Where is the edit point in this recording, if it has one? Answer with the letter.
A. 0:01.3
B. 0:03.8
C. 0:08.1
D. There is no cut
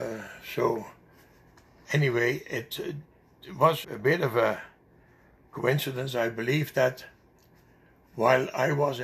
B